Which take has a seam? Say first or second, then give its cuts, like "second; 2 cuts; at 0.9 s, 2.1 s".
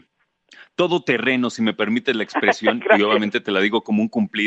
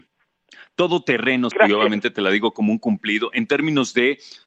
second; 1 cut; at 1.5 s